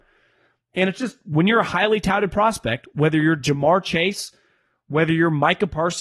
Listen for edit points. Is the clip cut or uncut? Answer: uncut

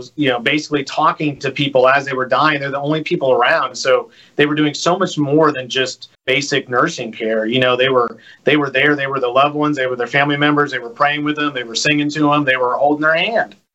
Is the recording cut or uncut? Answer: cut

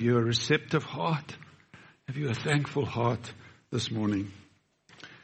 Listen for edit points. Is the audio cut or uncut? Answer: uncut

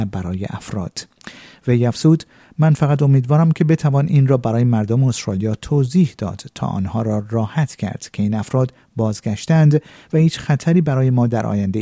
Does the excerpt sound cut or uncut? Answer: uncut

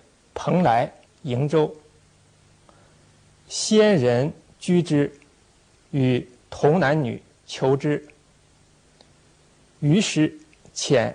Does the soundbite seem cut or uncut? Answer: cut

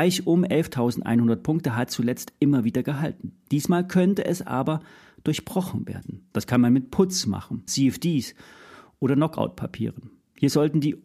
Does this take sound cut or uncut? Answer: cut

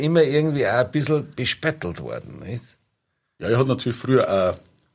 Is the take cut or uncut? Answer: uncut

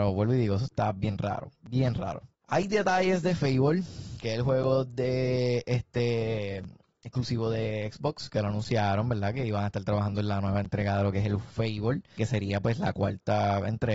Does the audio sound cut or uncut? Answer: cut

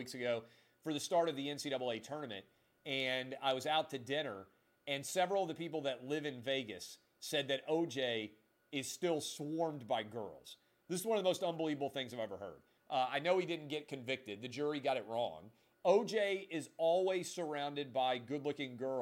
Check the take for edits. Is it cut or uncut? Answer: cut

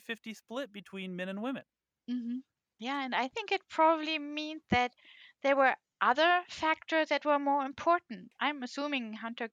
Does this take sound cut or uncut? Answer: uncut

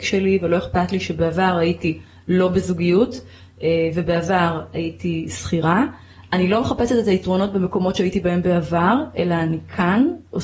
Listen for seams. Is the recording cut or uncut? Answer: uncut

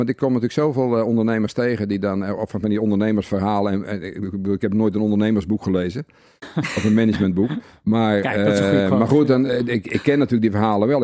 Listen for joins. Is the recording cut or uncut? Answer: uncut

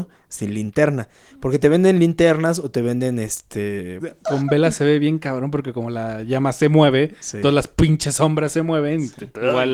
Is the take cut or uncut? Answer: cut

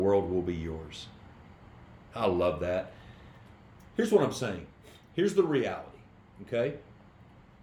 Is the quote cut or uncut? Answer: uncut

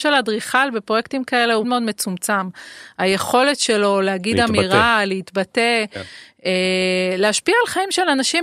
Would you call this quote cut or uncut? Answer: cut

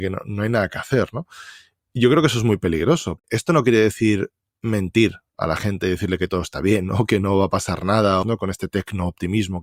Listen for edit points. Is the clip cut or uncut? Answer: cut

